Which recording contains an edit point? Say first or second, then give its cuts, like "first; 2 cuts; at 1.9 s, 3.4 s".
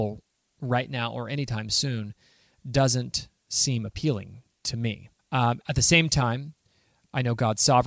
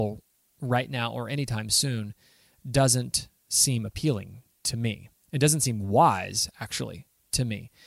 first; 1 cut; at 5.2 s